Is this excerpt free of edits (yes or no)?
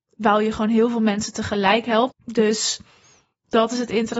no